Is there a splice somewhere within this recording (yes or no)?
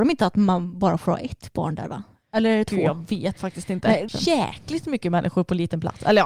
yes